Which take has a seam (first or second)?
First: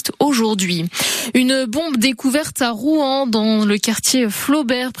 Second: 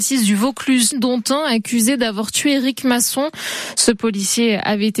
second